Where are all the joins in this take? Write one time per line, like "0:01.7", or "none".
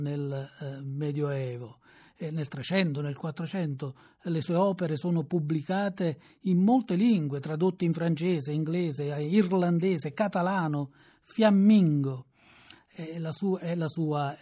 none